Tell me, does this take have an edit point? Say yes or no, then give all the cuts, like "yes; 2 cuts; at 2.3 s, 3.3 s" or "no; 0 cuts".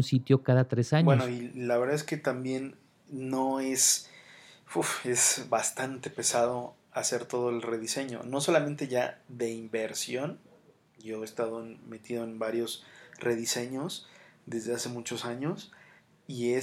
no; 0 cuts